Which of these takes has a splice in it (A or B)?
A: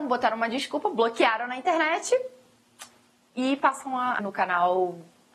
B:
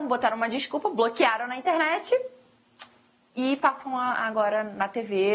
A